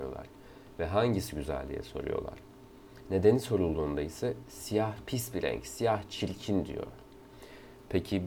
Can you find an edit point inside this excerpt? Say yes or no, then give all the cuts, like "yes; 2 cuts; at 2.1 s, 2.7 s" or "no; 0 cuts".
yes; 1 cut; at 3.0 s